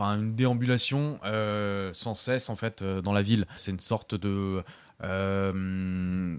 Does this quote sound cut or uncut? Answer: cut